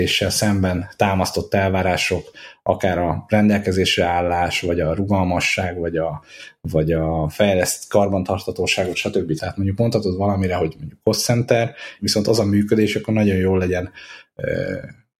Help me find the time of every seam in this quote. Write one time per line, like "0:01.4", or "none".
0:09.4
0:12.0